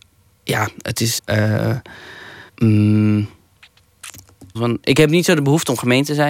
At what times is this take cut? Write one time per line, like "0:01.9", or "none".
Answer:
0:01.2
0:02.5
0:04.5